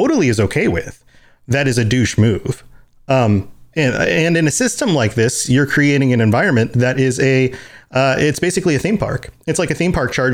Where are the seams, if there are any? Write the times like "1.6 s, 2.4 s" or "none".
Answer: none